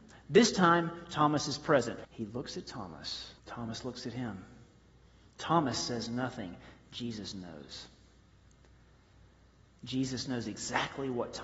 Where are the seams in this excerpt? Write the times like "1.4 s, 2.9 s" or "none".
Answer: 2.0 s, 3.4 s